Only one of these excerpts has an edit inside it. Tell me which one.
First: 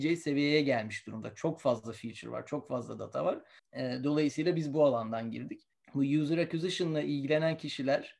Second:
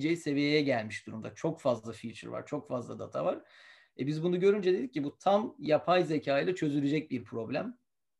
first; 2 cuts; at 3.6 s, 5.7 s

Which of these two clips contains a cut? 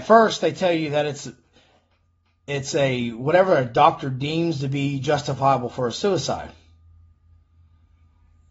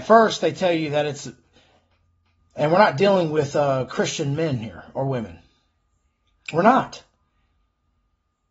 second; 1 cut; at 2.4 s

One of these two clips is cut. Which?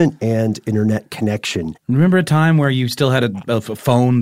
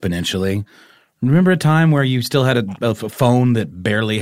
first; 1 cut; at 1.7 s

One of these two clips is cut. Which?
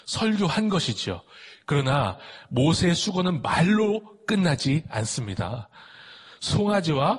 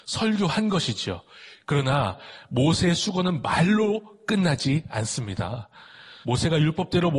second; 1 cut; at 6.2 s

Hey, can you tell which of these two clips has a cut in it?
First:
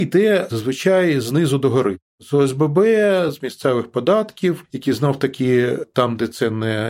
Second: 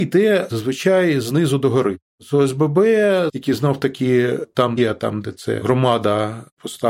second; 2 cuts; at 3.3 s, 4.8 s

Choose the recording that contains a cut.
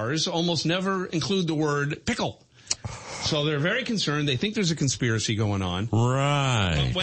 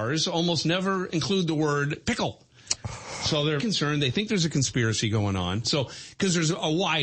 second; 2 cuts; at 3.6 s, 5.6 s

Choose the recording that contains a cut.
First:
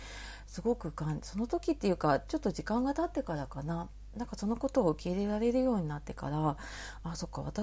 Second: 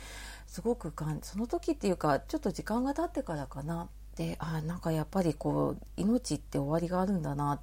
second; 1 cut; at 4.1 s

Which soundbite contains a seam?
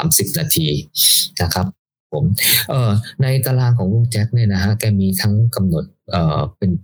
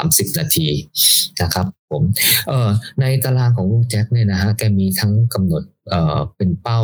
second; 1 cut; at 1.8 s

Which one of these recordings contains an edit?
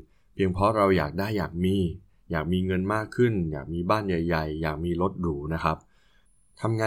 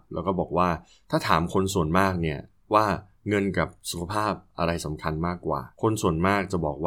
second; 1 cut; at 5.7 s

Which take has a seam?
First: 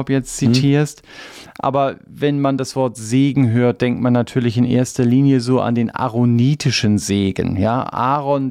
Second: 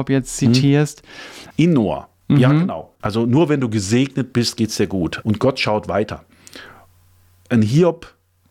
second; 3 cuts; at 1.5 s, 3.0 s, 5.2 s

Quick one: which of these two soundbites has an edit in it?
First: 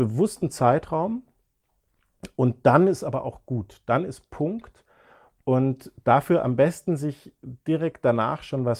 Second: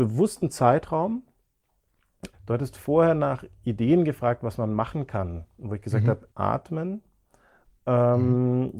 second; 2 cuts; at 2.3 s, 6.3 s

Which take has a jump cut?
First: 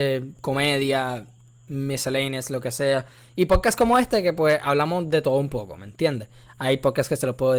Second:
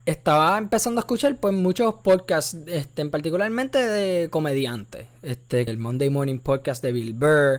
second; 1 cut; at 5.7 s

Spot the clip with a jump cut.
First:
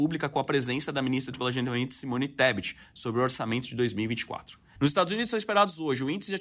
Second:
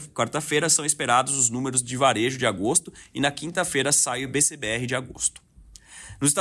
first; 1 cut; at 4.8 s

